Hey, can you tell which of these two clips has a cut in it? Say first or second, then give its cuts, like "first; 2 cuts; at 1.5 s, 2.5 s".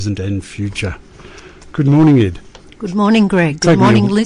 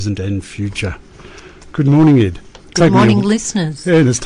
second; 1 cut; at 2.7 s